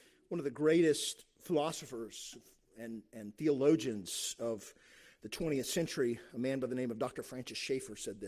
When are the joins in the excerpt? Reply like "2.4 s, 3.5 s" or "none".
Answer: none